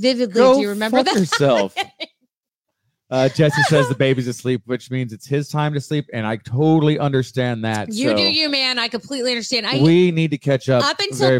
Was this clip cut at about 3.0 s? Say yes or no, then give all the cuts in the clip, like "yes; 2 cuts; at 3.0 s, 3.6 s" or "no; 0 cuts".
no; 0 cuts